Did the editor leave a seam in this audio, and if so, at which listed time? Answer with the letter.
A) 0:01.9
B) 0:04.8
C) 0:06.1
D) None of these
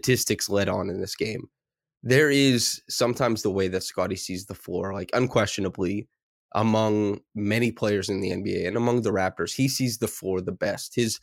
D